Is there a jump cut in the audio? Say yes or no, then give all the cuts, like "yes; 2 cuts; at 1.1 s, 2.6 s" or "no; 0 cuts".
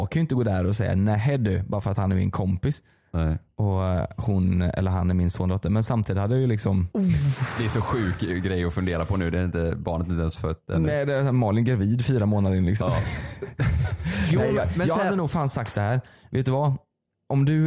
no; 0 cuts